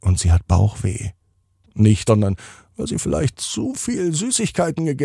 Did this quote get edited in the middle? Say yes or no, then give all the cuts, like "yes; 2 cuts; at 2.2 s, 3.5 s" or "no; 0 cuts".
yes; 1 cut; at 2.1 s